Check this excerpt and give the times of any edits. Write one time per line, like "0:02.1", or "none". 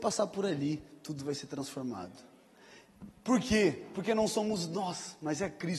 none